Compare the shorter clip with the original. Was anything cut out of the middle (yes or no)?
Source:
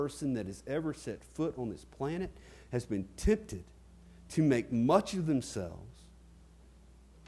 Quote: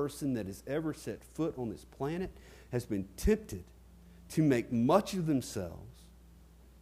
no